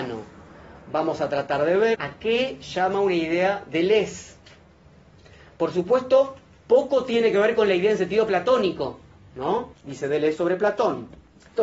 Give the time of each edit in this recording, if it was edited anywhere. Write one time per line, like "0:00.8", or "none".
0:01.9
0:09.7